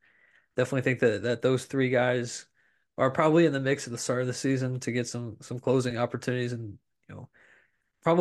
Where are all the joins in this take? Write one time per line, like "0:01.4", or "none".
none